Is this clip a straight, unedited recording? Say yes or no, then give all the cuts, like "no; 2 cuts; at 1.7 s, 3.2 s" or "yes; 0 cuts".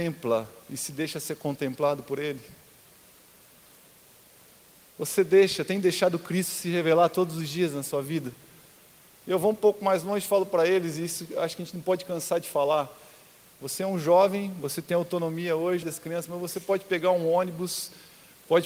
no; 1 cut; at 15.8 s